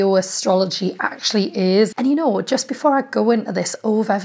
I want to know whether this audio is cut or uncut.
cut